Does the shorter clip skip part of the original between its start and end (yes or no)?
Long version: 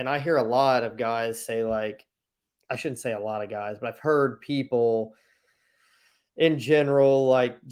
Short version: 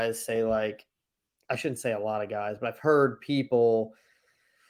no